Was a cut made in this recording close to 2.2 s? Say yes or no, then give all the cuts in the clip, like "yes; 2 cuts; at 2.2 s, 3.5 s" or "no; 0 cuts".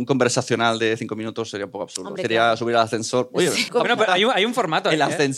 no; 1 cut; at 3.7 s